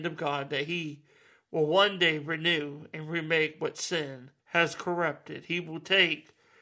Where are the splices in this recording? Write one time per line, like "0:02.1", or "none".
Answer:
0:04.4